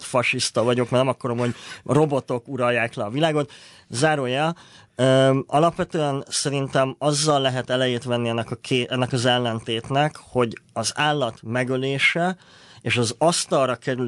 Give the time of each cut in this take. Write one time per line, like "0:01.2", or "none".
none